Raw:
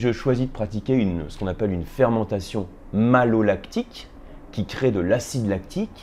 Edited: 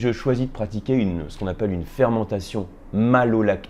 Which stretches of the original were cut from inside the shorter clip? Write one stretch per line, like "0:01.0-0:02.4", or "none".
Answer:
none